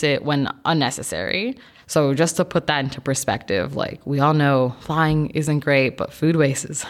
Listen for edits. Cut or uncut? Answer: cut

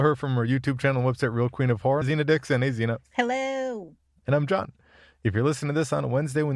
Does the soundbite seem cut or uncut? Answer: cut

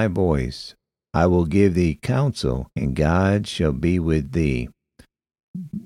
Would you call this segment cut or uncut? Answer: cut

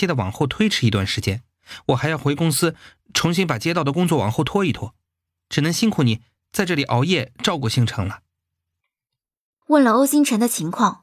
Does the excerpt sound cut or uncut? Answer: cut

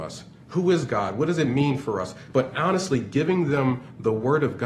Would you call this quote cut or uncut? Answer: uncut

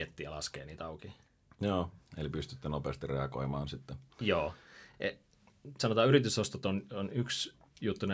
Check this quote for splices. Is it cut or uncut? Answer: uncut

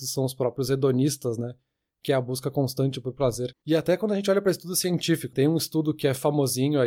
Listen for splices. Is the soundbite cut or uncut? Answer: cut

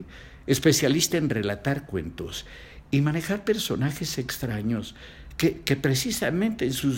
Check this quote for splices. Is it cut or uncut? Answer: uncut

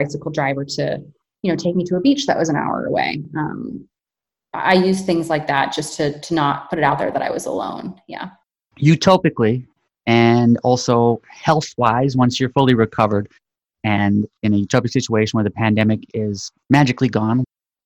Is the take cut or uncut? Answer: uncut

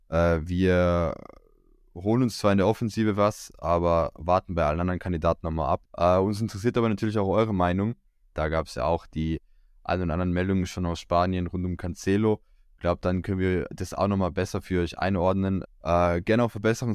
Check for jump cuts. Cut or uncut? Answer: cut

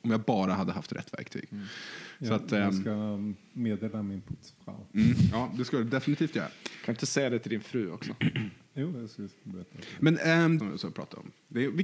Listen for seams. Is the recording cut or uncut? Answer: cut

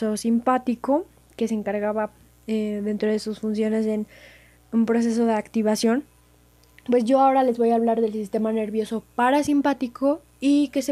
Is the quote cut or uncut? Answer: uncut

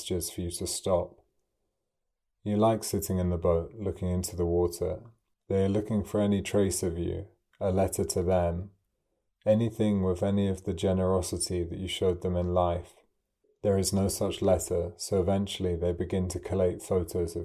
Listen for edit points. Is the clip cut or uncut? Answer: cut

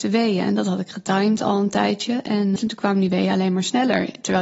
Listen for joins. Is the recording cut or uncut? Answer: cut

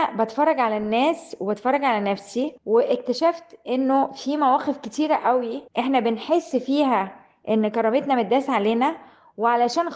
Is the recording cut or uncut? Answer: cut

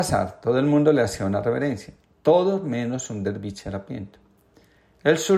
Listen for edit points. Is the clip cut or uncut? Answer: uncut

